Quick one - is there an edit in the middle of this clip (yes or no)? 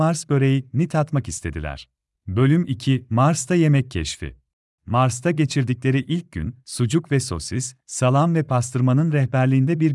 yes